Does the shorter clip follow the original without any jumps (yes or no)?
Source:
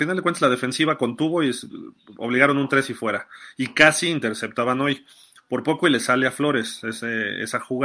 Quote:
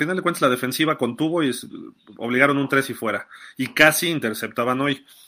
yes